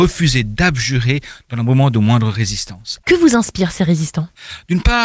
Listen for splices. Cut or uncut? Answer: cut